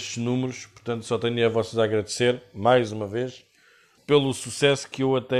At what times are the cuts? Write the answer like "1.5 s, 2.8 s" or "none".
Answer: 4.0 s